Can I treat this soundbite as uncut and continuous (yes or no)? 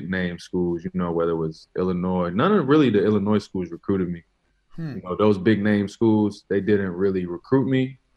yes